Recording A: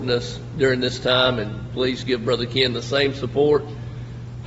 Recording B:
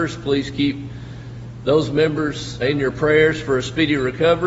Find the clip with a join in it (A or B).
B